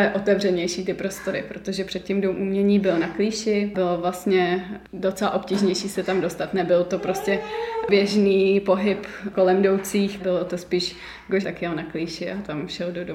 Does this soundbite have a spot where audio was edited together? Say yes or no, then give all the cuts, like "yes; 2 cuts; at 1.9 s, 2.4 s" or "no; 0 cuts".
yes; 2 cuts; at 10.2 s, 11.4 s